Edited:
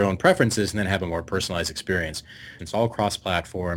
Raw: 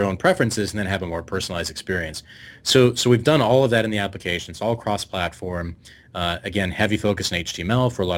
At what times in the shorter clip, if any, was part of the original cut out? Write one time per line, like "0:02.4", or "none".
0:02.6